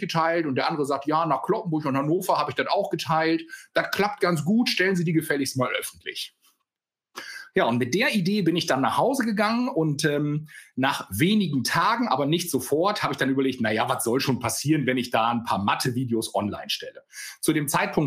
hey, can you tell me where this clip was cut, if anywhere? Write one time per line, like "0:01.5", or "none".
none